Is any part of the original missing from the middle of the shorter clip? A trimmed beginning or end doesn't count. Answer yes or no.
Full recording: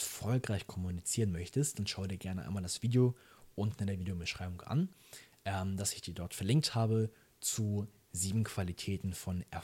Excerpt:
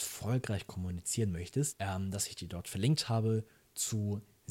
yes